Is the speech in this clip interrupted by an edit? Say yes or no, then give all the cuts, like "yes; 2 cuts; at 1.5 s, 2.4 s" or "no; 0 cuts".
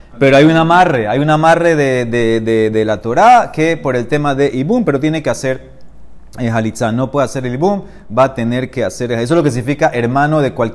no; 0 cuts